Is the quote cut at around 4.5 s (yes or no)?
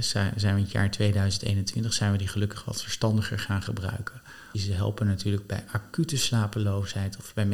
yes